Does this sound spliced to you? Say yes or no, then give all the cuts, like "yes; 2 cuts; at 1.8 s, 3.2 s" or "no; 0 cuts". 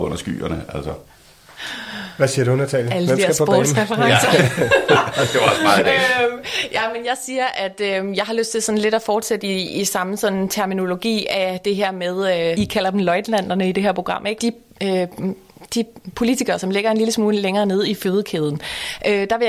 yes; 2 cuts; at 12.5 s, 14.4 s